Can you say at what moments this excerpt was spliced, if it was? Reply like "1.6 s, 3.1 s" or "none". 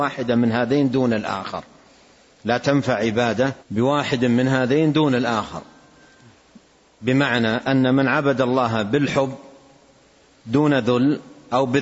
3.6 s